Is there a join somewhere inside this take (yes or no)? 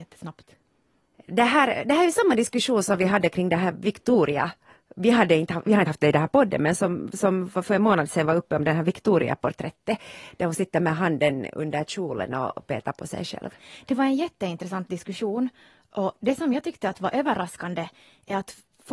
no